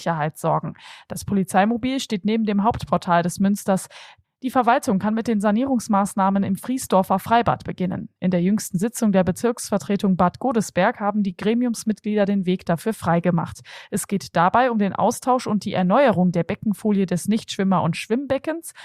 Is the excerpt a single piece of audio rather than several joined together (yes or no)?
no